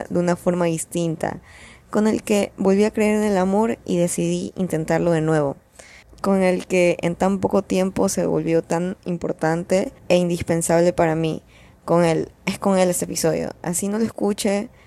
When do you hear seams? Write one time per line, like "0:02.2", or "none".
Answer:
0:06.0
0:10.0